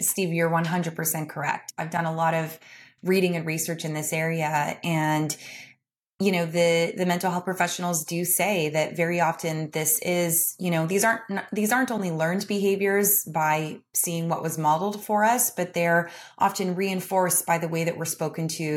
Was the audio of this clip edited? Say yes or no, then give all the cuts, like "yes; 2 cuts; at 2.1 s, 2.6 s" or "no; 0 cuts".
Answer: no; 0 cuts